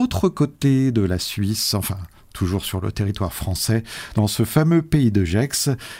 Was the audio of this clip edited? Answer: no; 0 cuts

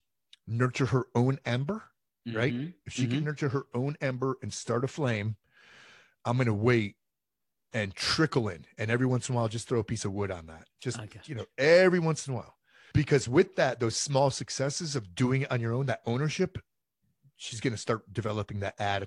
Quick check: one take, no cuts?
no; 1 cut; at 12.9 s

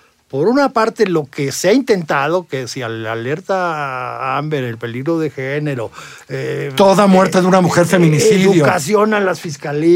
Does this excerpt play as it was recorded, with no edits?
yes; 0 cuts

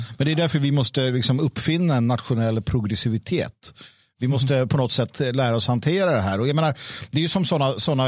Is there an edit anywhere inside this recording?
no; 0 cuts

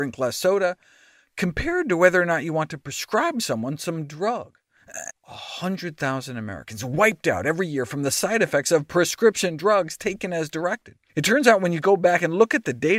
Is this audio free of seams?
no; 2 cuts; at 5.1 s, 11.1 s

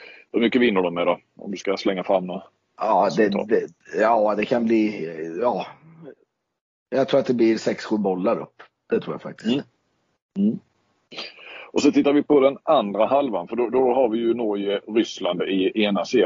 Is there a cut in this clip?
no; 0 cuts

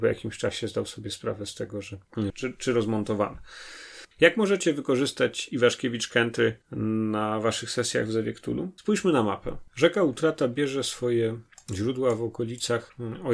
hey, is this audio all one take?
no; 2 cuts; at 2.3 s, 4.1 s

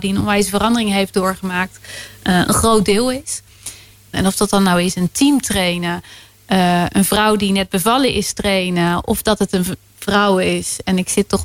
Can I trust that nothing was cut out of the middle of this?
no; 1 cut; at 4.1 s

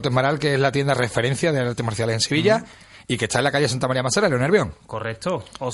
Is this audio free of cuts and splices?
yes; 0 cuts

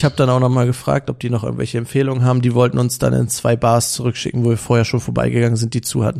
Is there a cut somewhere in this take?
no; 0 cuts

